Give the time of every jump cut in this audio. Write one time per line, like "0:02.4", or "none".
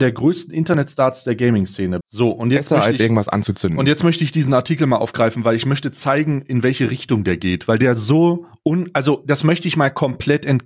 0:02.0